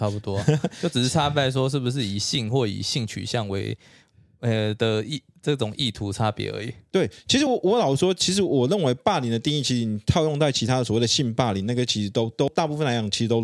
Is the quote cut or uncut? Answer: uncut